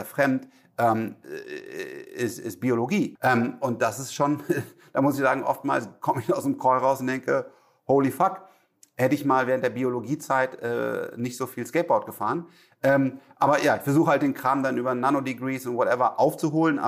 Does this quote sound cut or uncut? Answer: cut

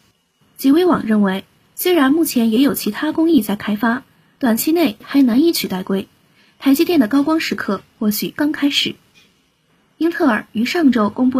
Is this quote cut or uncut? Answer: cut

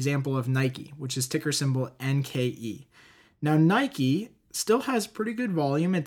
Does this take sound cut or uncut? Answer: uncut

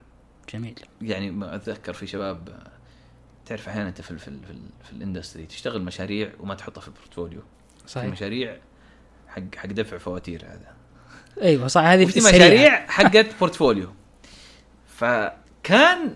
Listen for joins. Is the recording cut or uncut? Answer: uncut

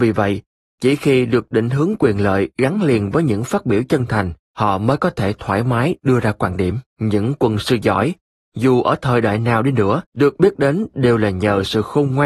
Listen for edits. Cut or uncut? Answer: cut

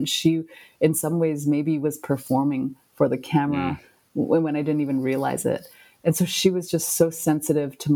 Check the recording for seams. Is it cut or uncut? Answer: uncut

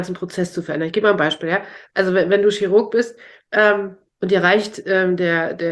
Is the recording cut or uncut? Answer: uncut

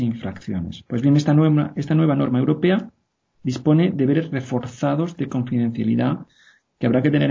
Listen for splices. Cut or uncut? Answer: uncut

